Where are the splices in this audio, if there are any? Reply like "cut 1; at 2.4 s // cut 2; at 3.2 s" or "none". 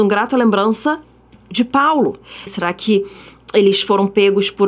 cut 1; at 2.5 s